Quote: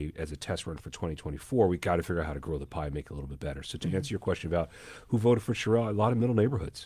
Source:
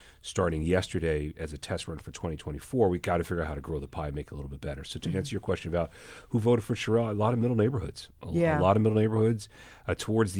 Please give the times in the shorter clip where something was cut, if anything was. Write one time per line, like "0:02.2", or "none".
none